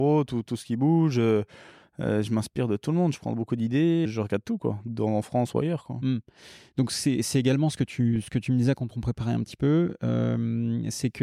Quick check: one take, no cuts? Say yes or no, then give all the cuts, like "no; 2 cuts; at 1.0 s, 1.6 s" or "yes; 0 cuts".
no; 1 cut; at 4.0 s